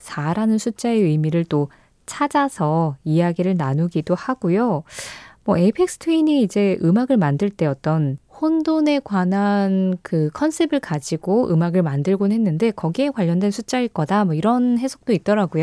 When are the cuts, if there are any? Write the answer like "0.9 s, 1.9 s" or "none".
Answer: none